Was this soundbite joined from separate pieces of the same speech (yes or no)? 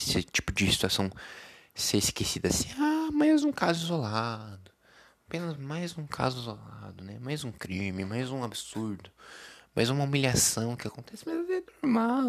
no